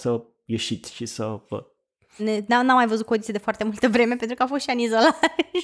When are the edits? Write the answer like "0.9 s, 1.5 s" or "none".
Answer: 2.2 s

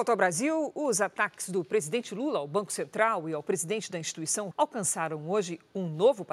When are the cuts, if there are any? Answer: 4.5 s

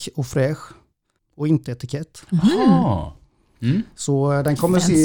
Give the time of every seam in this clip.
1.2 s

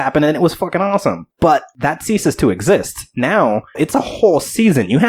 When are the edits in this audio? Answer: 3.7 s

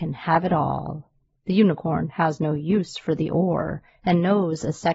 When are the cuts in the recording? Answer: 1.4 s

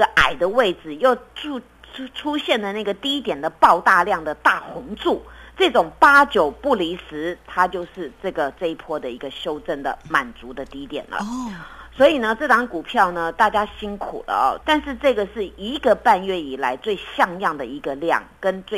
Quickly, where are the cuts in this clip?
14.6 s

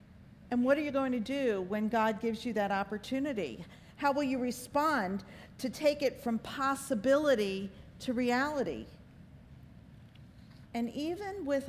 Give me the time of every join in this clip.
10.7 s

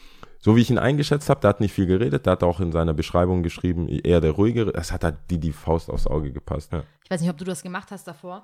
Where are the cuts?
6.7 s

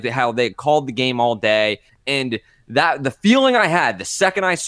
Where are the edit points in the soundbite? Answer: 1.9 s

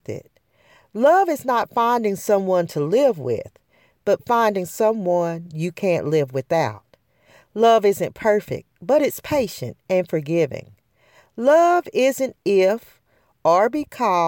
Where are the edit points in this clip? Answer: none

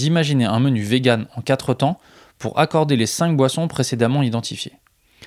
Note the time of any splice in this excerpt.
none

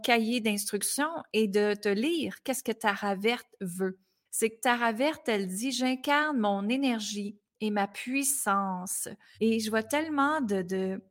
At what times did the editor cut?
4.3 s, 9.3 s

